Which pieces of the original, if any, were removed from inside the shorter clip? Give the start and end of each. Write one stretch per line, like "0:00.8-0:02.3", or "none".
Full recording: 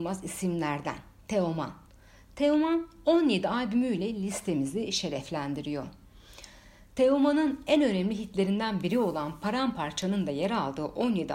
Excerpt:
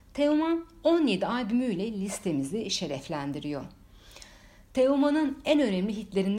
none